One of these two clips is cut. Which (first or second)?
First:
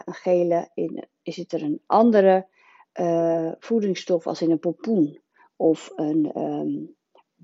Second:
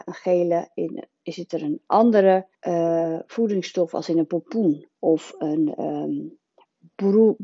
second